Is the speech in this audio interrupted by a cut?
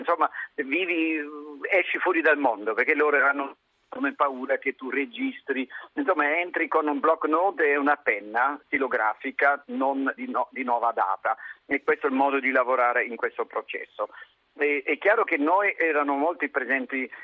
yes; 1 cut; at 10.2 s

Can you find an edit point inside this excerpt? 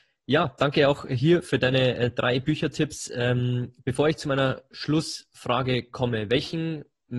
no; 0 cuts

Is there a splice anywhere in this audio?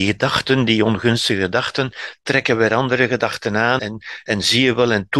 yes; 1 cut; at 3.8 s

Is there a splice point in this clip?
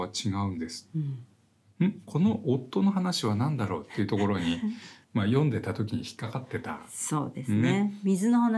no; 0 cuts

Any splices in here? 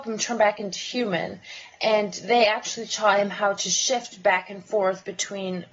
no; 0 cuts

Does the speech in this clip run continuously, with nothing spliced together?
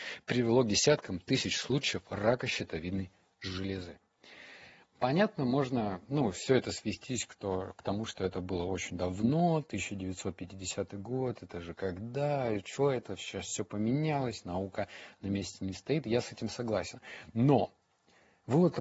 yes; 0 cuts

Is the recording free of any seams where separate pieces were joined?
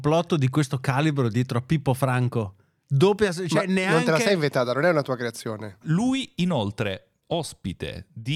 no; 2 cuts; at 5.8 s, 7.2 s

